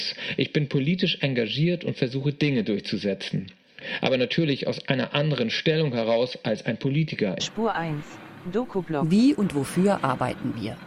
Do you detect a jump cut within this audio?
yes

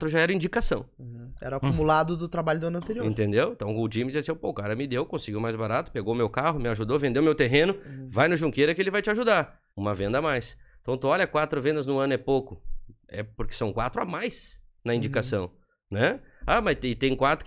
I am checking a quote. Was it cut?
yes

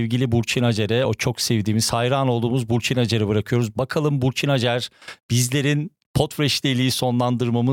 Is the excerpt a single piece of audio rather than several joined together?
yes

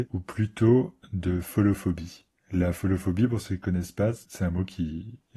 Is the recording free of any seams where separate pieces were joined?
yes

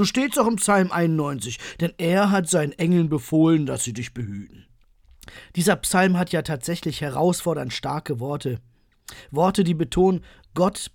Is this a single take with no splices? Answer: yes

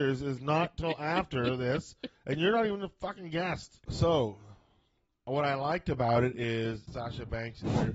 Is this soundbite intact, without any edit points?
no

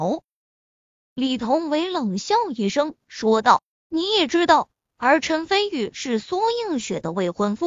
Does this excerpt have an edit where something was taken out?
yes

